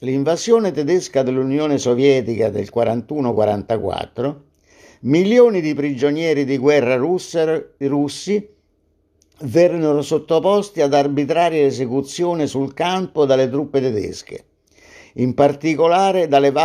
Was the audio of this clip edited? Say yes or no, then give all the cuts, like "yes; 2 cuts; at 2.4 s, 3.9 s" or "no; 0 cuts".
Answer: no; 0 cuts